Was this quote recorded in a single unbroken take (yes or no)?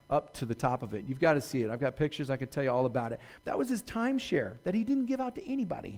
no